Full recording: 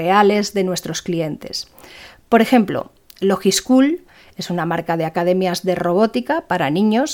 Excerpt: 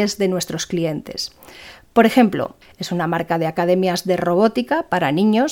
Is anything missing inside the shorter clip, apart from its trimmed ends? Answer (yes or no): yes